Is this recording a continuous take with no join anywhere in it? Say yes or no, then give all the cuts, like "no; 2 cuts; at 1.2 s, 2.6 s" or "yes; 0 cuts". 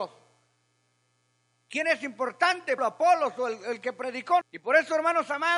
no; 2 cuts; at 2.8 s, 4.4 s